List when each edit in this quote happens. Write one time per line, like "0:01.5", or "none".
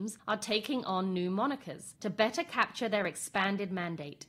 0:02.0